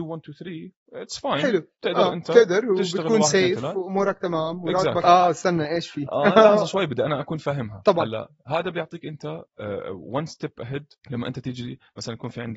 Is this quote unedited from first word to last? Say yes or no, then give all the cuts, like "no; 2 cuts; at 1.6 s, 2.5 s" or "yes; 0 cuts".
no; 2 cuts; at 5.0 s, 11.0 s